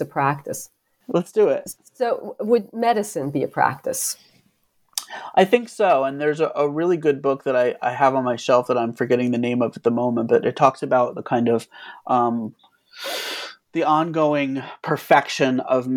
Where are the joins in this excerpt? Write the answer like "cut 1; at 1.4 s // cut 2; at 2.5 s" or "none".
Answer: cut 1; at 1.0 s